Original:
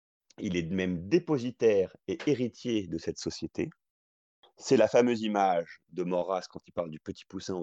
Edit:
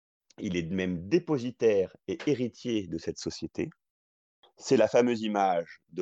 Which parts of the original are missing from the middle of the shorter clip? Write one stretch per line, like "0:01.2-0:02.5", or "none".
none